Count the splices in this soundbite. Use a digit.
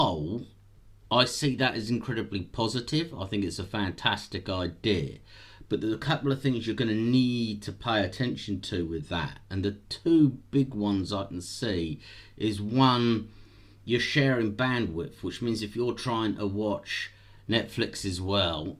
0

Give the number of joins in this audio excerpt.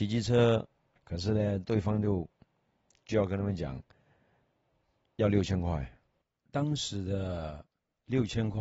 1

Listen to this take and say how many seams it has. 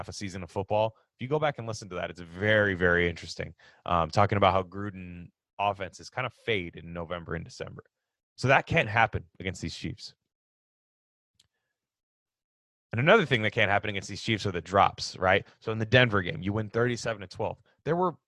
0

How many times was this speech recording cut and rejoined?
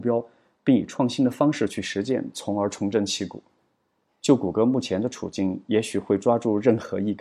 1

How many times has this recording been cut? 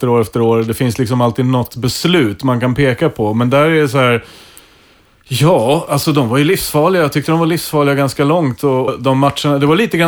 1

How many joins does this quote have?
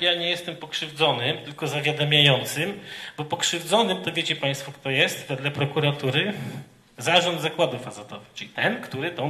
0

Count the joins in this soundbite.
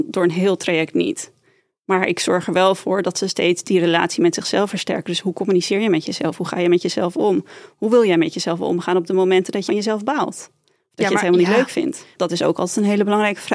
2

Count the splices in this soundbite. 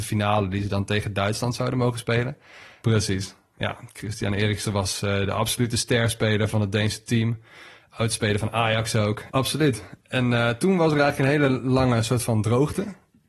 2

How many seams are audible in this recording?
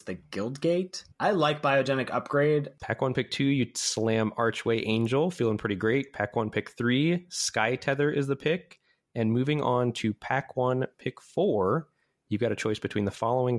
2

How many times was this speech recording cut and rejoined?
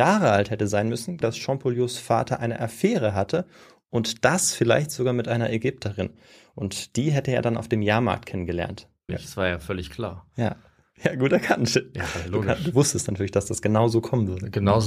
2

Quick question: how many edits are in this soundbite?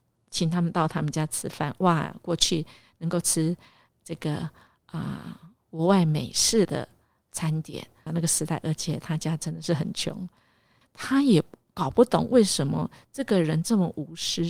2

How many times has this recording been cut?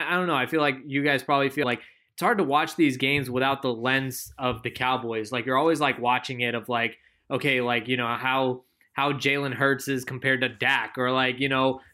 1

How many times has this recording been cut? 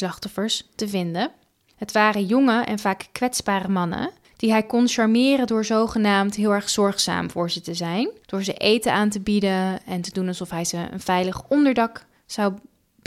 0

